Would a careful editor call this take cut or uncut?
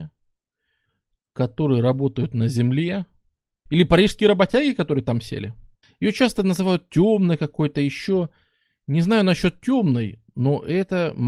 cut